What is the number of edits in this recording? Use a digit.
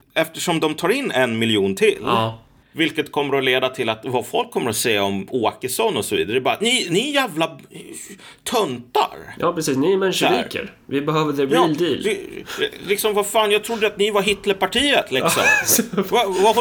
1